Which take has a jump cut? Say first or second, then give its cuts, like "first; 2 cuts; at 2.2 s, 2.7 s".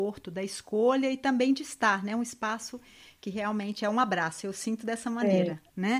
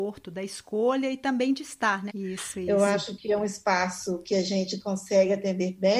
second; 1 cut; at 2.1 s